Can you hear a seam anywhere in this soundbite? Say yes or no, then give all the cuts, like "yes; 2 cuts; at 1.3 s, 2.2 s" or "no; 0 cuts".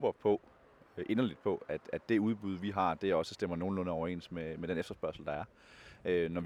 no; 0 cuts